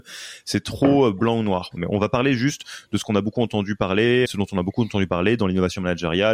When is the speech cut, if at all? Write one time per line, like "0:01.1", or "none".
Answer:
0:01.8
0:04.2